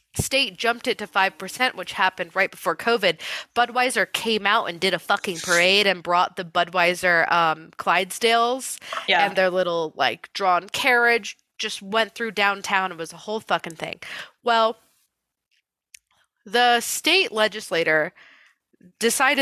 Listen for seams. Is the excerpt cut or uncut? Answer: uncut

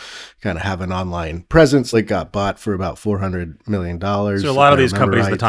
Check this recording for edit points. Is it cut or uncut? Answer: cut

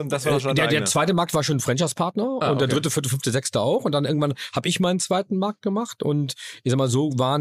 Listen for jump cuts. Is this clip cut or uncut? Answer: uncut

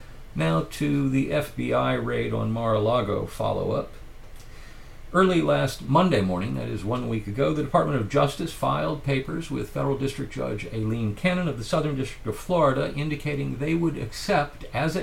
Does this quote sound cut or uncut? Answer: uncut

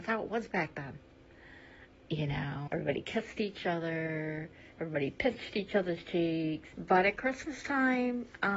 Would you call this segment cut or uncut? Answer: cut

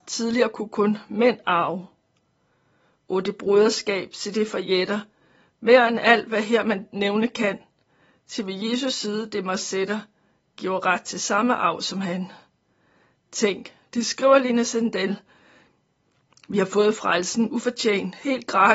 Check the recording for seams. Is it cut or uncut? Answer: uncut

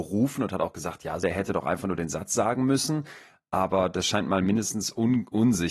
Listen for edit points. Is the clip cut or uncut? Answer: cut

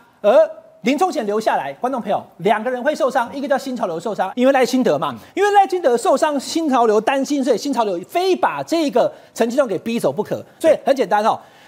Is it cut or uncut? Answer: cut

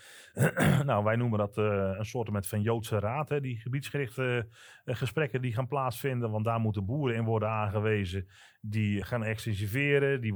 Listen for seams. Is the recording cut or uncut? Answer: cut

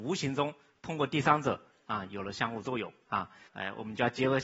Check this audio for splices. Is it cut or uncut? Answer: cut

